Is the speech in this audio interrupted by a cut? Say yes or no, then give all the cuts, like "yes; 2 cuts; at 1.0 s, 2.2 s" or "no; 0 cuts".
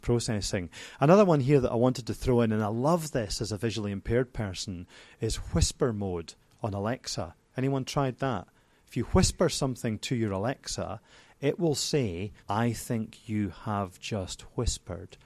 yes; 1 cut; at 12.4 s